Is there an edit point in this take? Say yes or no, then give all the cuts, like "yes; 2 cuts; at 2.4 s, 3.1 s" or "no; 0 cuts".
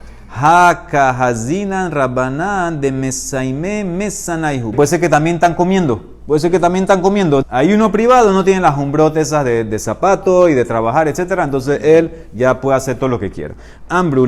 yes; 2 cuts; at 4.7 s, 7.4 s